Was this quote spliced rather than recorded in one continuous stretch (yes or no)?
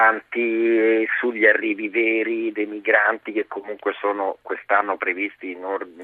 no